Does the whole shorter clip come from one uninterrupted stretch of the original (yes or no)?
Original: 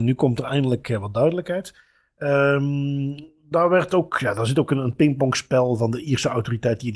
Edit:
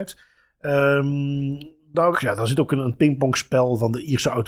no